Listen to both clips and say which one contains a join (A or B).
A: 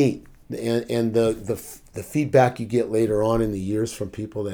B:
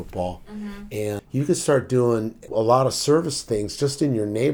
B